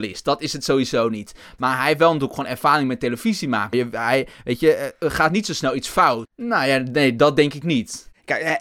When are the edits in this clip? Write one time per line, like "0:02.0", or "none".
0:03.7
0:06.2